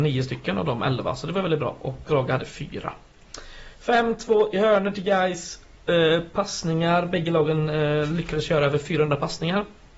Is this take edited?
no; 0 cuts

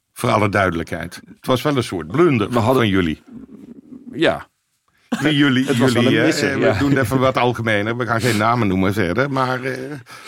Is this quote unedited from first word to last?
no; 1 cut; at 5.2 s

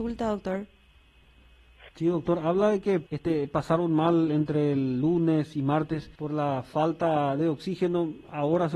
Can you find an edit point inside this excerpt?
yes; 3 cuts; at 1.9 s, 3.1 s, 6.2 s

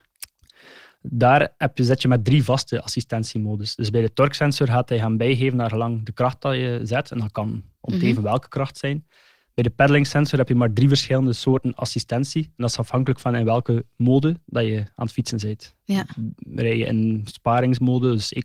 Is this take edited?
no; 0 cuts

